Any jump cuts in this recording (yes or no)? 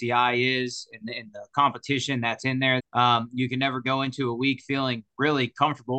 yes